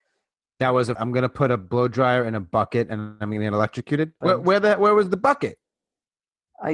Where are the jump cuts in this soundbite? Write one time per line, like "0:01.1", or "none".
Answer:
0:00.9
0:04.2